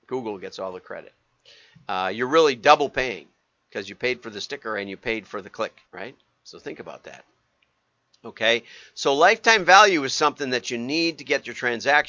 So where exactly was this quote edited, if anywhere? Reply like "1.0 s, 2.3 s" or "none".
5.8 s